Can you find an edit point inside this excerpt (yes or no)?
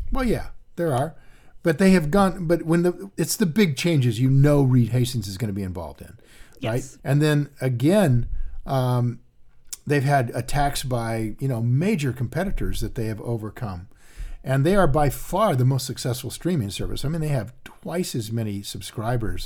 yes